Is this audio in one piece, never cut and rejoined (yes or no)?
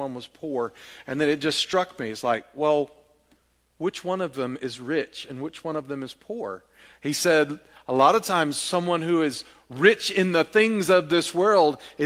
no